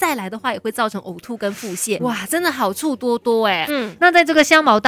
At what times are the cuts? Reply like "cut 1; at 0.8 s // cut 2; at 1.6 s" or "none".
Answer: cut 1; at 2.0 s // cut 2; at 3.7 s